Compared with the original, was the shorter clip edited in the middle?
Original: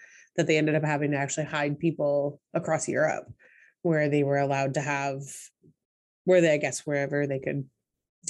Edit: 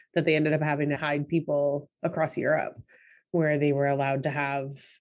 yes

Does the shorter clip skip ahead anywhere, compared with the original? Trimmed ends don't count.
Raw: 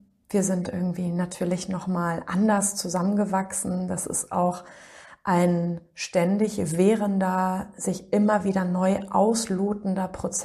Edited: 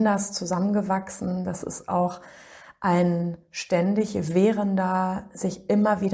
no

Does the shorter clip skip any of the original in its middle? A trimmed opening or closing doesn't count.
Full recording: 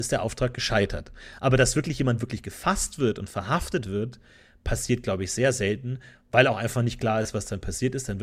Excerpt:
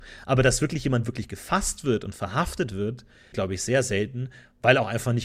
yes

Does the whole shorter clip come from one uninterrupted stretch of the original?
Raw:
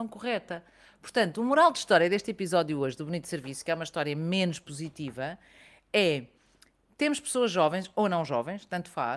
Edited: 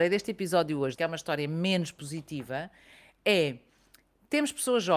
no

